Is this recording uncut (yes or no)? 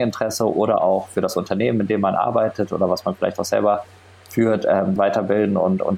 no